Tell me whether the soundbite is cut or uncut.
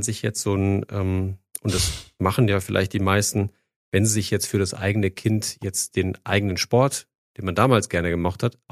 uncut